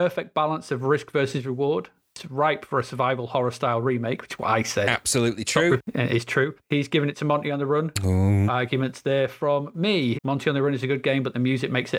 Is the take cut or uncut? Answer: cut